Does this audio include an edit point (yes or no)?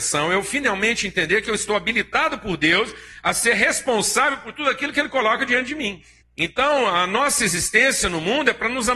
yes